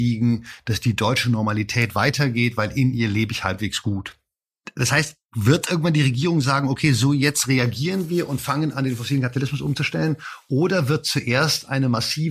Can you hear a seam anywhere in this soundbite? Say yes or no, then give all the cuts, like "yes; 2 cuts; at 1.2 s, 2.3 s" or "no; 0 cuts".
no; 0 cuts